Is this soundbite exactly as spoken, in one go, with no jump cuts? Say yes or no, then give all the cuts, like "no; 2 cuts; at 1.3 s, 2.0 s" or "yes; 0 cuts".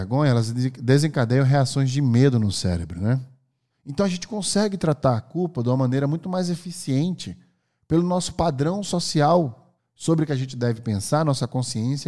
no; 2 cuts; at 3.7 s, 9.8 s